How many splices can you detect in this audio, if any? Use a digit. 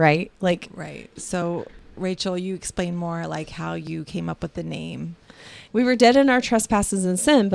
2